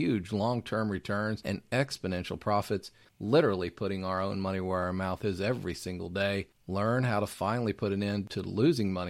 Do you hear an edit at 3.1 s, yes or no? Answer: yes